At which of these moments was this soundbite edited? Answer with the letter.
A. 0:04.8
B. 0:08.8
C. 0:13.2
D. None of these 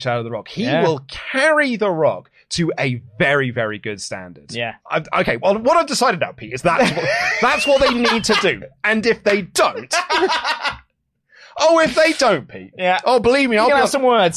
A